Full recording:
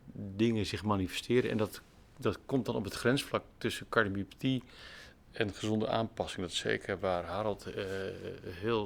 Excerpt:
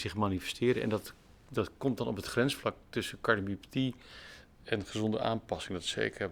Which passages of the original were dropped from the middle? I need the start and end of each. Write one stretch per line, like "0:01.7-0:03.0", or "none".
none

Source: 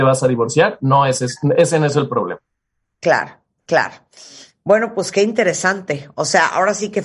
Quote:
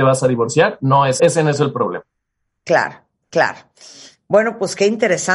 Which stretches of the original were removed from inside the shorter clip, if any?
0:01.2-0:01.6

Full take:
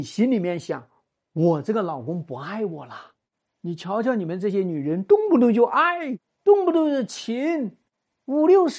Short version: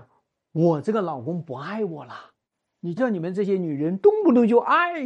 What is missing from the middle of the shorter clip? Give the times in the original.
0:03.8-0:04.0

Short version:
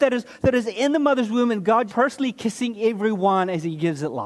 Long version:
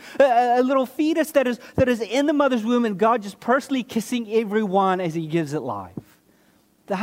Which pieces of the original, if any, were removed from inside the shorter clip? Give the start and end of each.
0:03.2-0:03.4

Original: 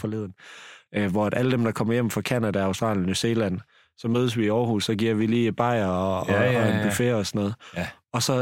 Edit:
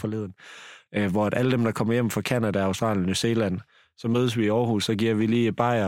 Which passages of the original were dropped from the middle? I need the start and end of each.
none

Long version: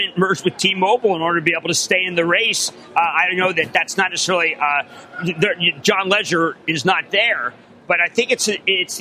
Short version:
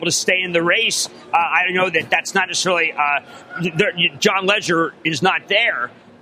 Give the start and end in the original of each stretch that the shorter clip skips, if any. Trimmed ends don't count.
none

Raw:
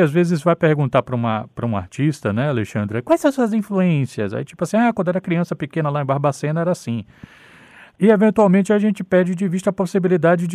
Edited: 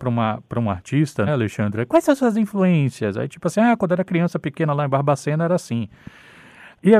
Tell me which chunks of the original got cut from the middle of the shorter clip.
0:02.3-0:02.4

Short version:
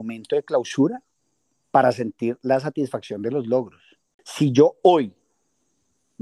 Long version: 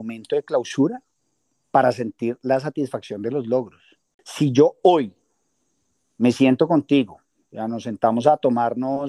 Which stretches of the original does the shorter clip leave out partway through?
none

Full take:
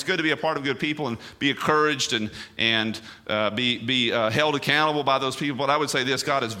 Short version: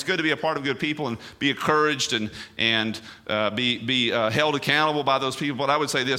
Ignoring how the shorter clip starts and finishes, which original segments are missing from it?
none

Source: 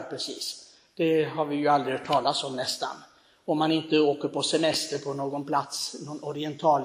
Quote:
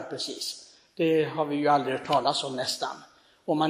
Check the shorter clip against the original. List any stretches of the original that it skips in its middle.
none

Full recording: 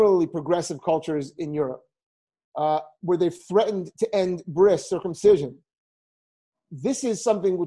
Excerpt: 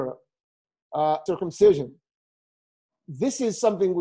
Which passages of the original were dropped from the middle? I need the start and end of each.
0:02.9-0:04.9

